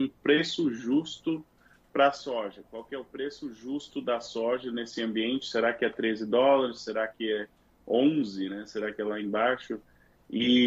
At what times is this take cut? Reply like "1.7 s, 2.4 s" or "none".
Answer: none